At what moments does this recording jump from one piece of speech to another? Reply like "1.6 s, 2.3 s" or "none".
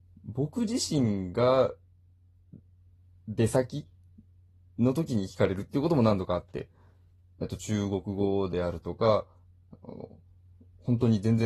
7.4 s